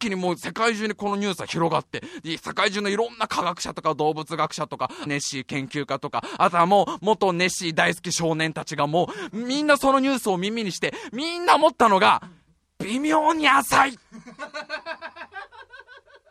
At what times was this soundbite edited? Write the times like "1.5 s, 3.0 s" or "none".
5.1 s